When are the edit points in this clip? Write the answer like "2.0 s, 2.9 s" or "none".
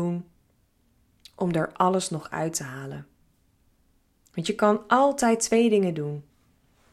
none